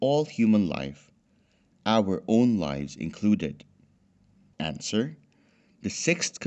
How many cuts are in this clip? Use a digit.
1